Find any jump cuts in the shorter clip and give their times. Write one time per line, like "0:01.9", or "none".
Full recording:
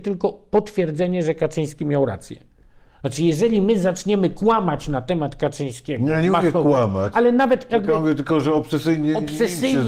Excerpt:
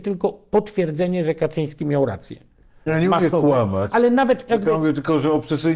0:02.9